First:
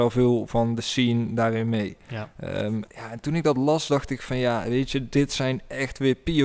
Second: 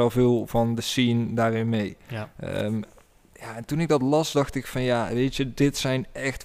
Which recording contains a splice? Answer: first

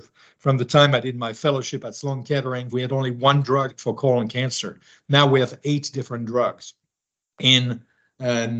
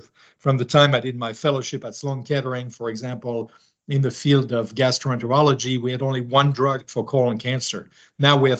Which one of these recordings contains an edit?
first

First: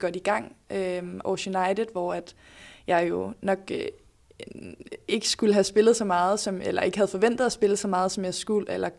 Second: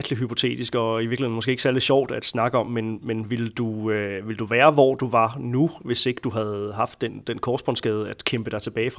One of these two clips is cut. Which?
first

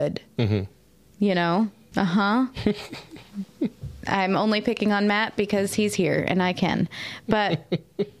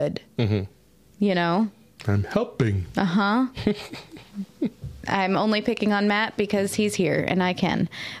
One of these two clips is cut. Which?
first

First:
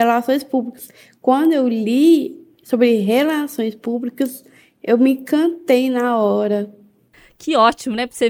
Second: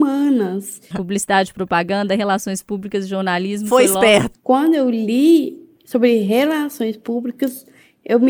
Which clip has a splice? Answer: second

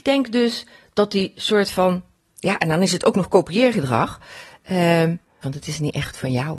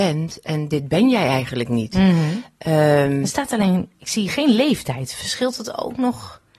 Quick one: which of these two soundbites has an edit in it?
first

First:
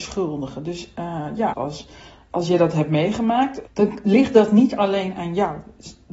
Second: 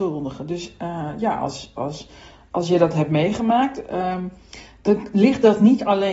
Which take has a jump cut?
first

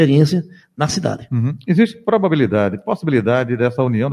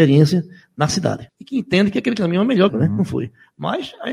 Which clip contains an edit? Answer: second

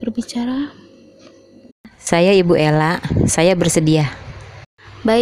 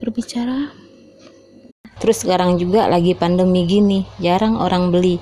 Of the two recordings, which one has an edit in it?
second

